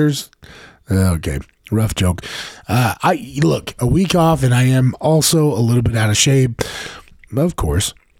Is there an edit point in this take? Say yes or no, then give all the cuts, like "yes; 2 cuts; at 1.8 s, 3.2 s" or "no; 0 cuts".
yes; 1 cut; at 7.3 s